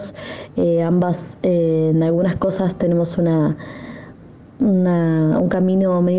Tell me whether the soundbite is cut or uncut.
uncut